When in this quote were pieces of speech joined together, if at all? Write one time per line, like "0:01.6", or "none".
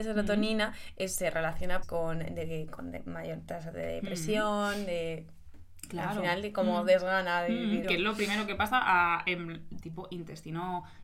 0:01.8
0:07.8
0:09.8